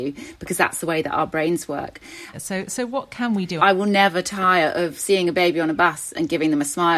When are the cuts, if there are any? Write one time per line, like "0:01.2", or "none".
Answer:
0:02.3
0:03.6